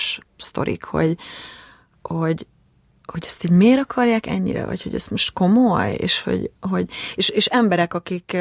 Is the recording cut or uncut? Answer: uncut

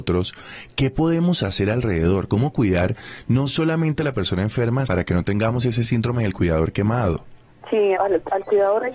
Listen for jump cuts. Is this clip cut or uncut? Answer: cut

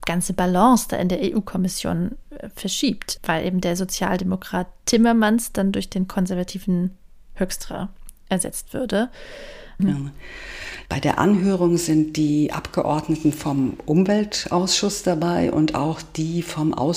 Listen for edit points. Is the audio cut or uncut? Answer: cut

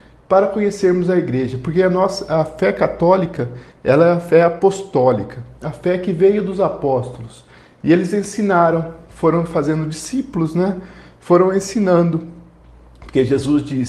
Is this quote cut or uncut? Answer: uncut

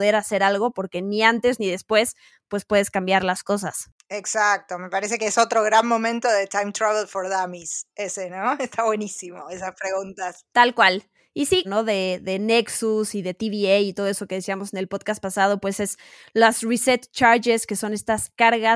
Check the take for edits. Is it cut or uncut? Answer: cut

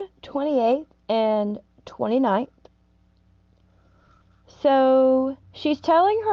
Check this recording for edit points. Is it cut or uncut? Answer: cut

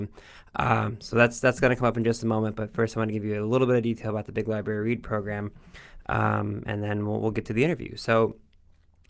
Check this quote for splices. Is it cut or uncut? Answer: uncut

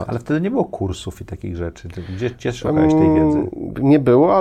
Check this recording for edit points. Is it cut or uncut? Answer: uncut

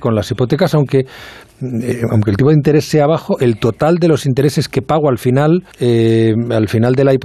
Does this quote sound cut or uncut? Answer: cut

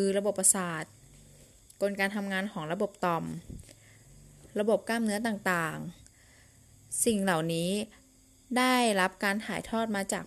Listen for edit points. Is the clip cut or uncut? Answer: cut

